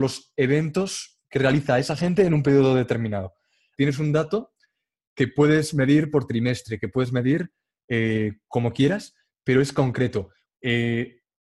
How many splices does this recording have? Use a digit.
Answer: 2